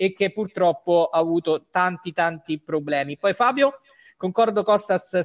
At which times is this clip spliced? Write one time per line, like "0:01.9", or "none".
none